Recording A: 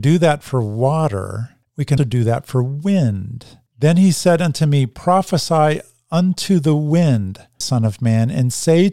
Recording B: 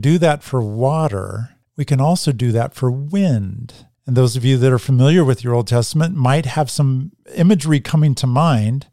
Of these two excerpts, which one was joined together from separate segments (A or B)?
A